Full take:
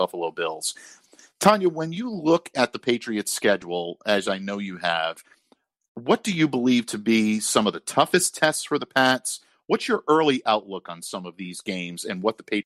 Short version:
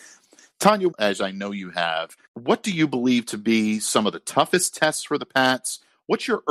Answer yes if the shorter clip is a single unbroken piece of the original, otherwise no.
no